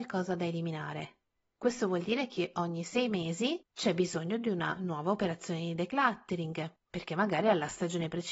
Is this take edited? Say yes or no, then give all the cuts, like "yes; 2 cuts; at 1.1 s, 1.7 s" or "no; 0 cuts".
no; 0 cuts